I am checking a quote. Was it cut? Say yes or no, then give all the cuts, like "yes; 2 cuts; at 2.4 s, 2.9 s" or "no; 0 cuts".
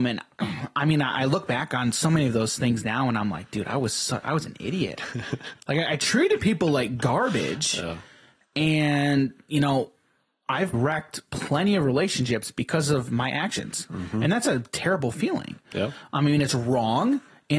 yes; 1 cut; at 10.7 s